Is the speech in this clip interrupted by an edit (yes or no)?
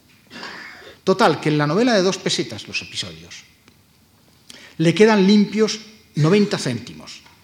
yes